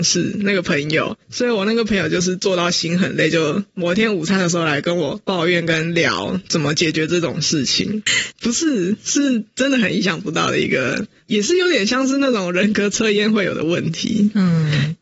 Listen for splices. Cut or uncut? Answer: cut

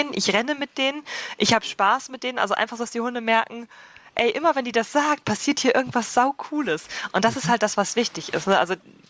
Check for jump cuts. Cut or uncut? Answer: uncut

